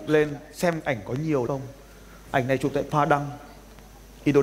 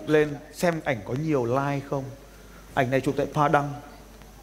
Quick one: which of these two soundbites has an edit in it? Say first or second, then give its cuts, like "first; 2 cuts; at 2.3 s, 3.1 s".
first; 1 cut; at 1.5 s